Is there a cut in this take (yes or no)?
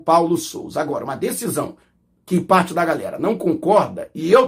no